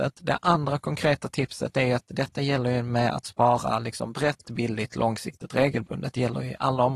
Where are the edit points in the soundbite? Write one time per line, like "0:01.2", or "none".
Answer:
0:04.4